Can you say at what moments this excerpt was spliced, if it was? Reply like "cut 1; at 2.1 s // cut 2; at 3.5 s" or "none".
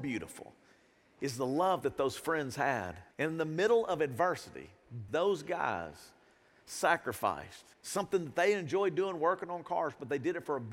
cut 1; at 3.1 s // cut 2; at 5.1 s // cut 3; at 7.7 s